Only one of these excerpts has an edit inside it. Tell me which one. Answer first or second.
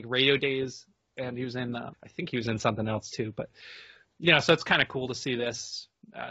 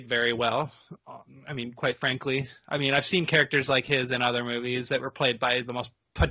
first